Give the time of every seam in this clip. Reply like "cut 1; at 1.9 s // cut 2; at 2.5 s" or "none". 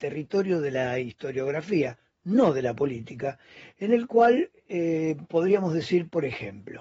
none